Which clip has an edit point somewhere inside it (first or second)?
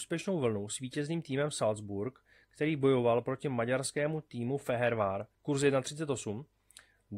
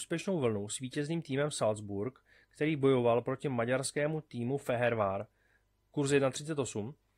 first